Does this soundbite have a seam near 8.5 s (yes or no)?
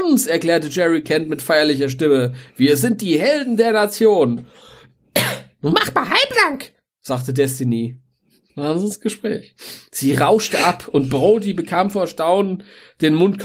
yes